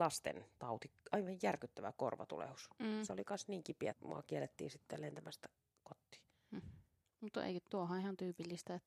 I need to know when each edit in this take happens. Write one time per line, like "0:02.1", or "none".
0:03.9